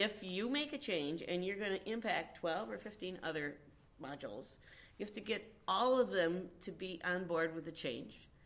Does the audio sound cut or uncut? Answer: uncut